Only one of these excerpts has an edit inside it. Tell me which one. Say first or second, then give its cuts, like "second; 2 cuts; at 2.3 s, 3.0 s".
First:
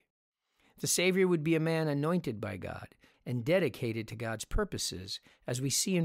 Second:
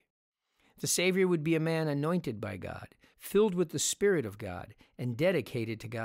first; 1 cut; at 3.1 s